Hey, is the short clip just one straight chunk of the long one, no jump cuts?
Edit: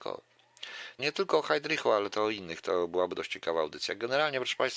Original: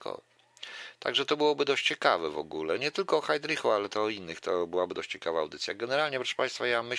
no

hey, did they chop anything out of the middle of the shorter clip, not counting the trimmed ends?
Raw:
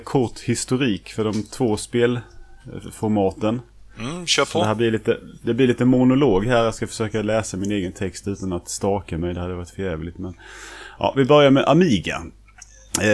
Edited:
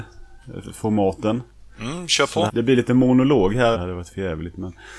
yes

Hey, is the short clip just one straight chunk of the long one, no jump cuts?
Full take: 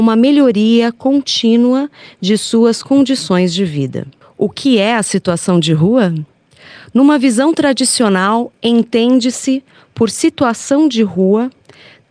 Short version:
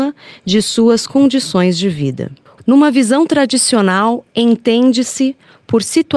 no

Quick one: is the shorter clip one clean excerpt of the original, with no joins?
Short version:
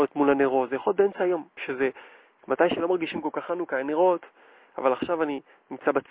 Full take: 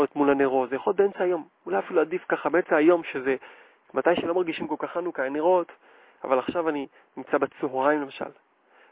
no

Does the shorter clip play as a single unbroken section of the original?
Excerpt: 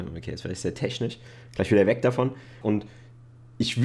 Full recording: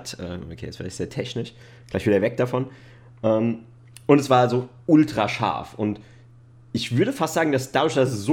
no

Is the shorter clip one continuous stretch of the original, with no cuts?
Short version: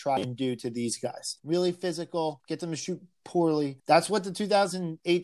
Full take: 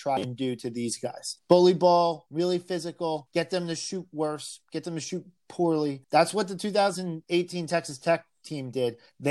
no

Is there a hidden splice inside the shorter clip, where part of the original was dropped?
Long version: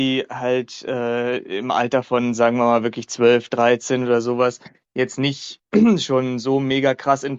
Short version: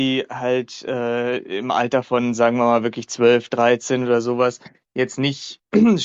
no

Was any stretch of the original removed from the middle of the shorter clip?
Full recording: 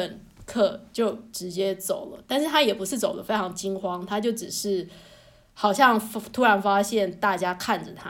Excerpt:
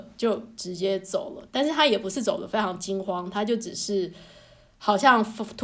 no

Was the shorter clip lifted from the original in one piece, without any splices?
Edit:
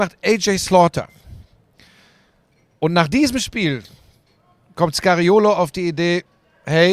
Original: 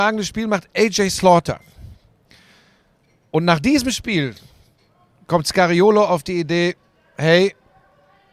yes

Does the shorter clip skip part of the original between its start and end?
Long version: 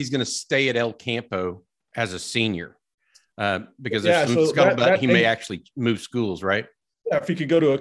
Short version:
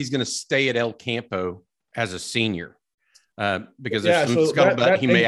no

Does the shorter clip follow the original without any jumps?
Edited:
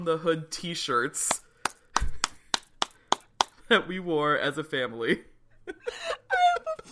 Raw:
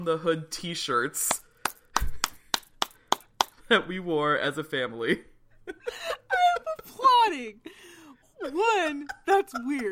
yes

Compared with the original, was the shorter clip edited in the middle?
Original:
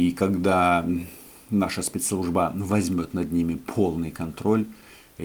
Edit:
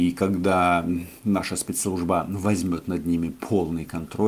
yes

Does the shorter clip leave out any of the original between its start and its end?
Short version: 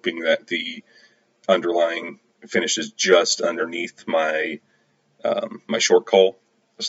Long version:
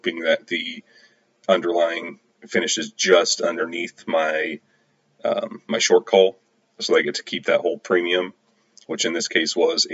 no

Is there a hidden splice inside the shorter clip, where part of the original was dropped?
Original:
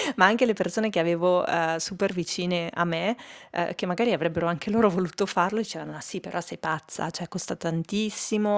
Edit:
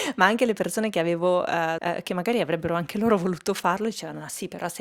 yes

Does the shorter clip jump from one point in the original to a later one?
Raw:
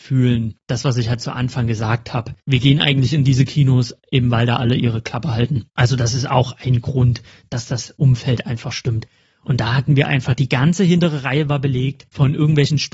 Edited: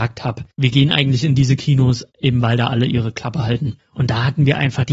yes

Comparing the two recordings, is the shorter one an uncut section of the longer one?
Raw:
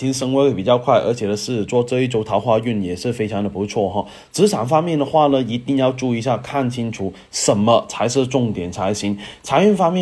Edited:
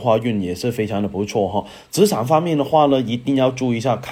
yes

